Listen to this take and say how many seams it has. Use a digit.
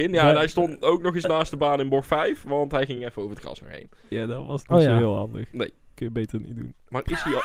0